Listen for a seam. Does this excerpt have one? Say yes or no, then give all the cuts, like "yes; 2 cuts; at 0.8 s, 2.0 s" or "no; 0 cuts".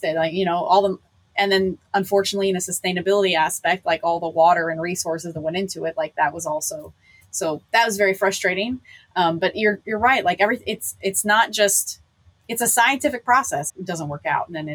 yes; 1 cut; at 13.7 s